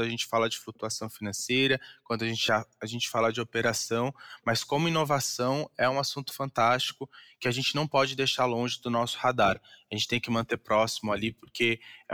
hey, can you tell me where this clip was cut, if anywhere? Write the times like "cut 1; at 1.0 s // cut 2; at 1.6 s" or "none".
none